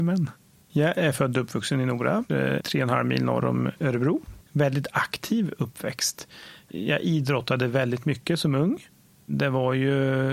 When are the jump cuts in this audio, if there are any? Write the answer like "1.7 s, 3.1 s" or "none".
2.3 s, 4.5 s